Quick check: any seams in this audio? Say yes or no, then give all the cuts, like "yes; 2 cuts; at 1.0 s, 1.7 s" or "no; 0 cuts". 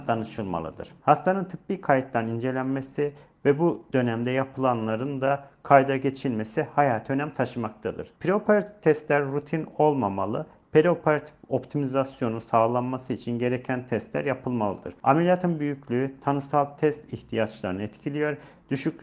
yes; 1 cut; at 1.0 s